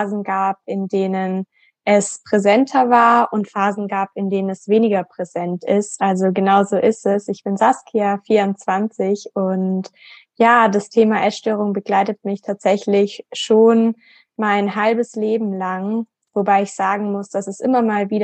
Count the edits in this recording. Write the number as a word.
one